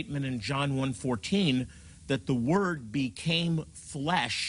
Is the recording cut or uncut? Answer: uncut